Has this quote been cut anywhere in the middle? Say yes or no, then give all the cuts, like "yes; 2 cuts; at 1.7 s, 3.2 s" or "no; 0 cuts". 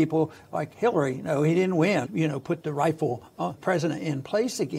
yes; 2 cuts; at 2.0 s, 3.6 s